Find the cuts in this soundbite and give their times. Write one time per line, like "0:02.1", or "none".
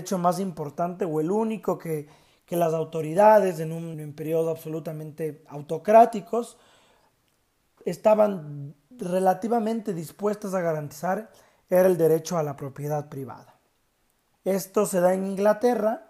0:03.9
0:14.4